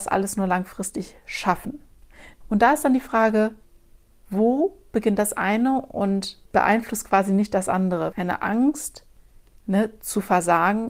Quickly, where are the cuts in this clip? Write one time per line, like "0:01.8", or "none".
0:02.4
0:06.5
0:08.1